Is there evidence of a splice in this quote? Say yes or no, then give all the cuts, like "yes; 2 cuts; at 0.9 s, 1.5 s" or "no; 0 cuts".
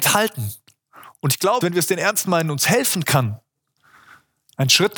yes; 1 cut; at 1.6 s